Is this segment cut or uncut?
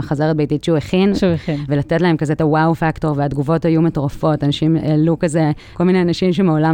cut